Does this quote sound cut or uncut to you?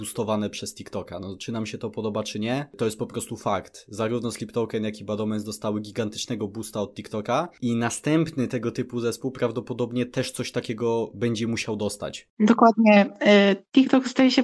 uncut